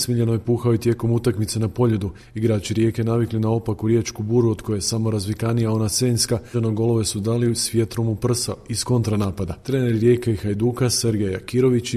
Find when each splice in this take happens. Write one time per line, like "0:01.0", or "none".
0:06.5
0:09.6